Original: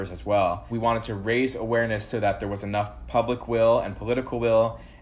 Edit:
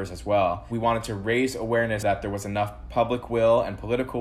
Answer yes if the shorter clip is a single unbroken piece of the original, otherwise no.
no